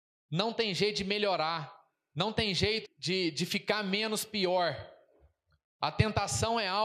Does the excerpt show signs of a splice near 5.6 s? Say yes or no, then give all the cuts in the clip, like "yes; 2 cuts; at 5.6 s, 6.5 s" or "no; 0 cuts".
no; 1 cut; at 2.8 s